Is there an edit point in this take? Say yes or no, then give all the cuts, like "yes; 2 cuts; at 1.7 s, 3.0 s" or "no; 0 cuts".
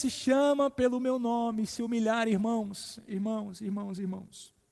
no; 0 cuts